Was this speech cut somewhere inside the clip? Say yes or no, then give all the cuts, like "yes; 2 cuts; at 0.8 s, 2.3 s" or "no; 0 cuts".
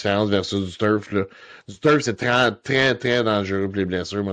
no; 0 cuts